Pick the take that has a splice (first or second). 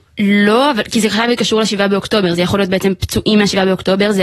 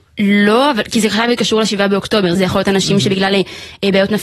second